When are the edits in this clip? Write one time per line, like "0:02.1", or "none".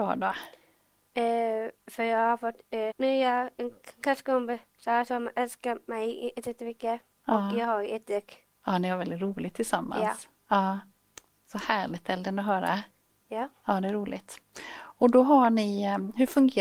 0:02.9
0:08.6